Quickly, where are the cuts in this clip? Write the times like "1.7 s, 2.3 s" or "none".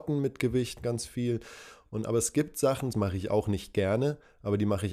2.9 s